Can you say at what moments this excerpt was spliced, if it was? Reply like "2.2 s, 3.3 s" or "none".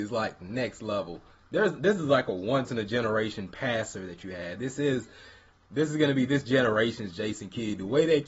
none